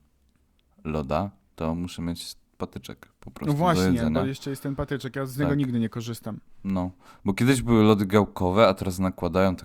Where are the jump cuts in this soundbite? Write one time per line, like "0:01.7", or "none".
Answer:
none

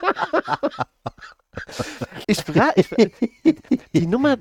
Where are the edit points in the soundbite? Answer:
0:02.2

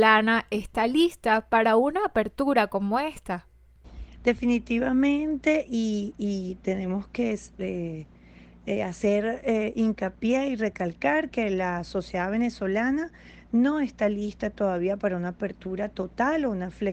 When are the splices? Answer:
none

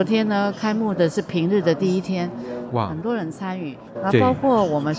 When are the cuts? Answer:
0:02.7
0:03.9

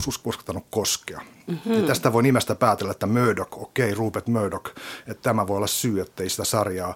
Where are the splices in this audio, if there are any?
none

